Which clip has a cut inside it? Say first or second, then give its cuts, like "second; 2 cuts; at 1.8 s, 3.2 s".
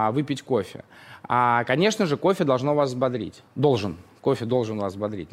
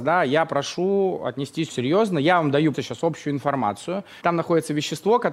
second; 3 cuts; at 1.7 s, 2.7 s, 4.2 s